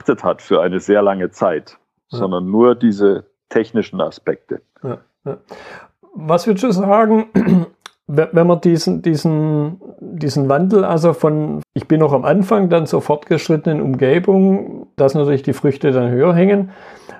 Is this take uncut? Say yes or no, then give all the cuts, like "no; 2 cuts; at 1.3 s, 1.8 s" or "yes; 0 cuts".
no; 3 cuts; at 4.7 s, 11.6 s, 15.0 s